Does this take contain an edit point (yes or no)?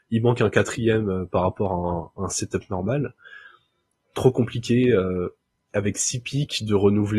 no